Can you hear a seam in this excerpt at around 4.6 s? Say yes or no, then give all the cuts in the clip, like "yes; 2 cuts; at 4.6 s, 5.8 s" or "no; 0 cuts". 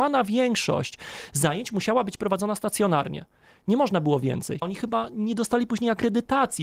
yes; 1 cut; at 4.6 s